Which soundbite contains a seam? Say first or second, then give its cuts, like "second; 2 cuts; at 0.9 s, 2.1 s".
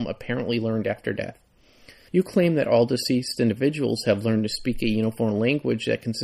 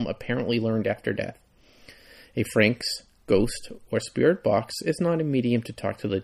first; 1 cut; at 2.1 s